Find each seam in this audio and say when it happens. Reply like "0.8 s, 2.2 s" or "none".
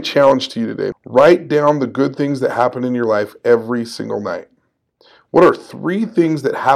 0.9 s